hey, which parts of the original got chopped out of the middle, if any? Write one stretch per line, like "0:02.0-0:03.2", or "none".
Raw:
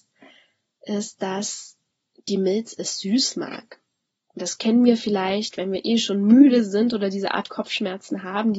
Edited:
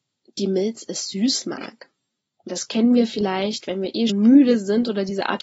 0:06.0-0:06.1